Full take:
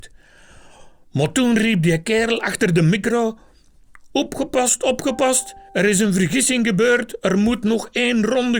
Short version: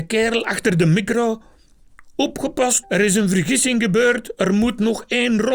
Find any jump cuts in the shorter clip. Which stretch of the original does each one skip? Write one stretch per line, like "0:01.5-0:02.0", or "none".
0:04.8-0:05.7